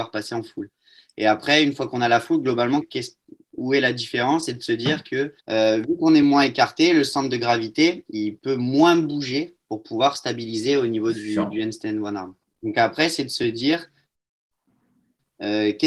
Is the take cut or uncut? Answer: cut